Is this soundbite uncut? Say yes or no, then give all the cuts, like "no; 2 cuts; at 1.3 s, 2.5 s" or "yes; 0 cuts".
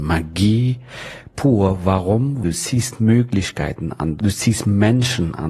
no; 2 cuts; at 2.4 s, 4.2 s